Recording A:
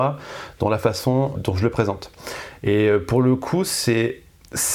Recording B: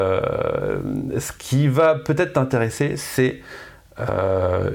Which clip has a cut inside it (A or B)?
A